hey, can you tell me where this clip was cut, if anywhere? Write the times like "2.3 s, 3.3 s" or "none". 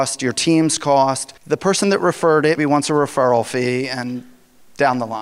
1.4 s, 2.6 s